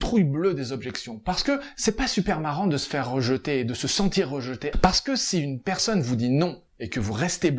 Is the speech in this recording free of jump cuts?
no; 1 cut; at 4.7 s

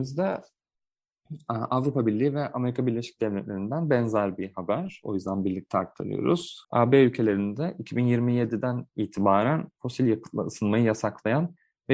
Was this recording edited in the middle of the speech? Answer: yes; 1 cut; at 6.6 s

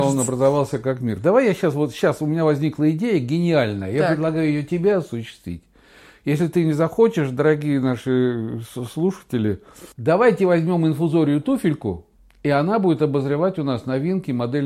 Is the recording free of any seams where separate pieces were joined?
yes; 0 cuts

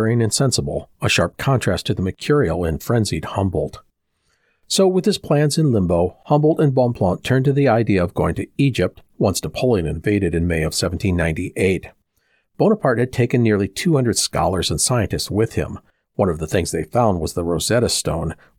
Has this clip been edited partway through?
no; 0 cuts

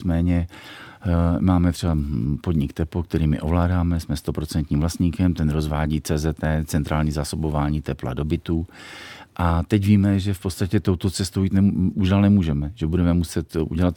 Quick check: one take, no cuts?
yes; 0 cuts

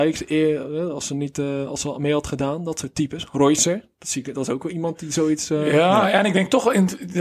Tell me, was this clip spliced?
no; 0 cuts

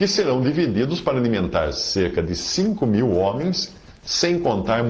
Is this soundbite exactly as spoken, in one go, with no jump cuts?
yes; 0 cuts

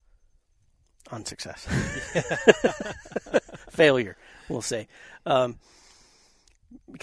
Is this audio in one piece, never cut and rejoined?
yes; 0 cuts

